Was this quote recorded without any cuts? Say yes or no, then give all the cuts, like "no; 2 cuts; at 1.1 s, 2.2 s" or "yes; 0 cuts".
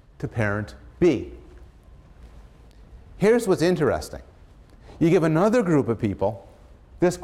yes; 0 cuts